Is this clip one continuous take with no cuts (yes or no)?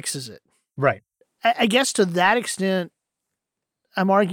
yes